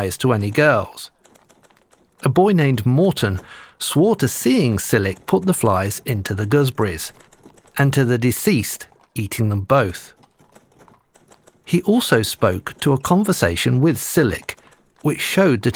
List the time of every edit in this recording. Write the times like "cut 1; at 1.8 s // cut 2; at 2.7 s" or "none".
none